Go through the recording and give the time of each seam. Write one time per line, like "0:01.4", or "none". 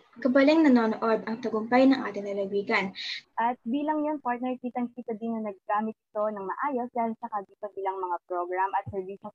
0:03.2